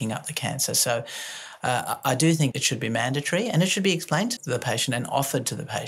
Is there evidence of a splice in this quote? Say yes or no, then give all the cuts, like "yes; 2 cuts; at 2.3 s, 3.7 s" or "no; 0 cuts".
yes; 2 cuts; at 2.5 s, 4.4 s